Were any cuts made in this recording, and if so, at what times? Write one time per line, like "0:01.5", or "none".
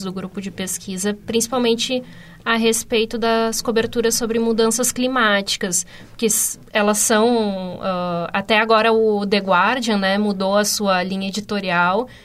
none